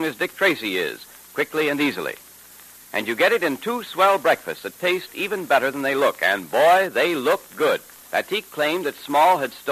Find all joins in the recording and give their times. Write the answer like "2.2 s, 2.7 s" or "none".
8.0 s